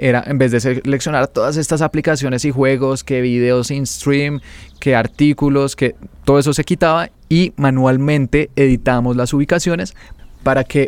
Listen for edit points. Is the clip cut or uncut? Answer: uncut